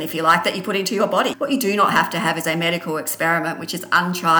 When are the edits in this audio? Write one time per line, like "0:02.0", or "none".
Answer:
0:01.3